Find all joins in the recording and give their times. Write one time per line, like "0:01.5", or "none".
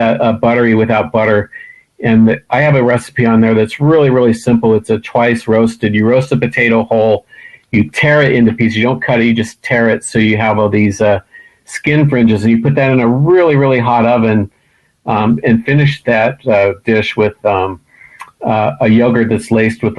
none